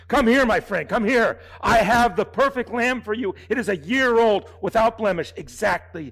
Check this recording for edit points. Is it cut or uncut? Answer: uncut